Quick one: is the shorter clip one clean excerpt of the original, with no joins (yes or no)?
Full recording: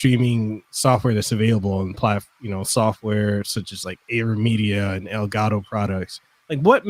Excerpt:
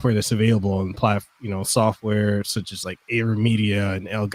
yes